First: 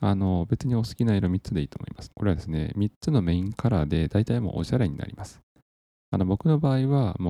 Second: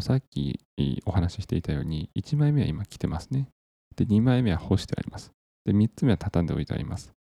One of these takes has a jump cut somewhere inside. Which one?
first; 1 cut; at 2.1 s

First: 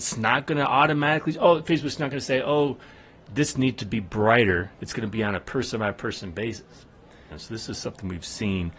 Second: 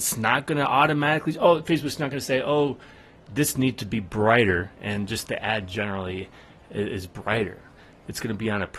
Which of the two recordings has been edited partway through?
first; 2 cuts; at 4.7 s, 7.3 s

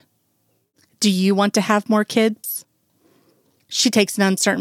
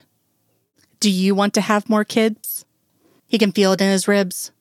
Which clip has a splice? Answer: second; 1 cut; at 3.2 s

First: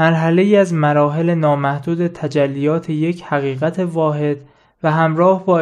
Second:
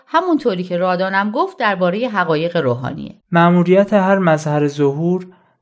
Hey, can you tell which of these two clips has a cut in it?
second; 1 cut; at 3.2 s

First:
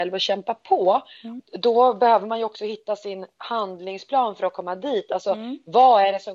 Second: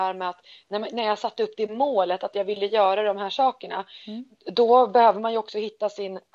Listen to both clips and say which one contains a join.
first; 1 cut; at 1.4 s

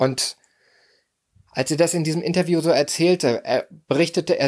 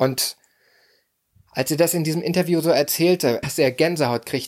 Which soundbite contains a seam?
second; 1 cut; at 3.4 s

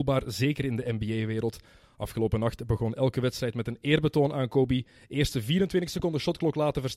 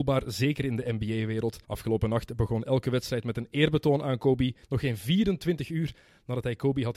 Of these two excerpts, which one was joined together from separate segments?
second; 2 cuts; at 1.6 s, 4.6 s

